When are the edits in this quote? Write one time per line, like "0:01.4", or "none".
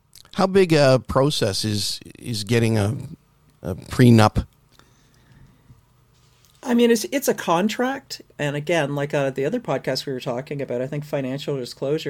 0:08.3

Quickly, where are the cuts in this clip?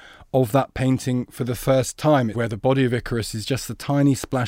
0:02.3

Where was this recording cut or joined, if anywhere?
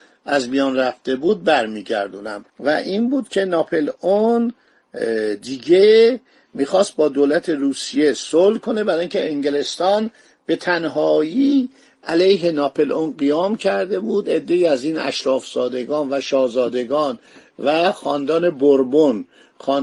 0:02.5

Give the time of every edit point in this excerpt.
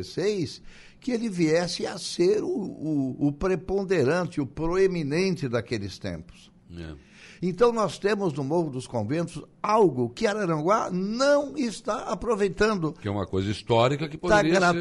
0:07.4

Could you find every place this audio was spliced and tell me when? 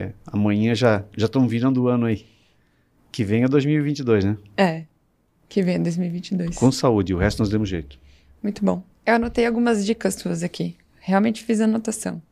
0:08.4

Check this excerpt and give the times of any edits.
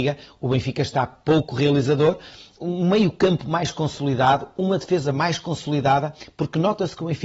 0:02.6

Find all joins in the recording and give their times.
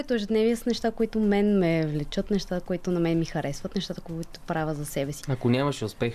0:05.2

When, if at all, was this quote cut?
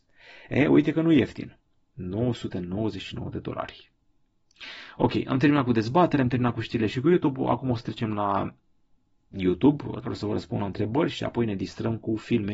none

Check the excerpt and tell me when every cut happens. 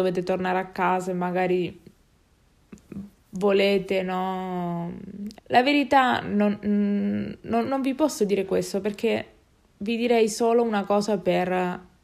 0:05.4
0:07.7

